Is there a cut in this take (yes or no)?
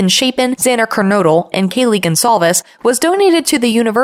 yes